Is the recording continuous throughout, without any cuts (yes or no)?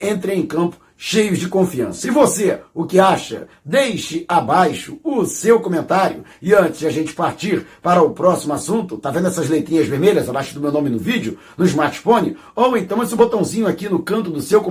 yes